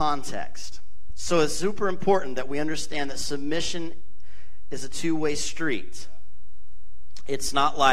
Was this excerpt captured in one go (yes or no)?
yes